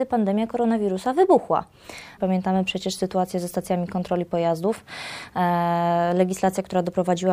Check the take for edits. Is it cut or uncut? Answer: cut